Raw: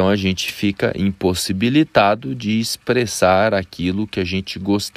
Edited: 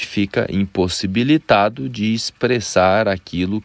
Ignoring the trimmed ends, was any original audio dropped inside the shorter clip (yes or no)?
no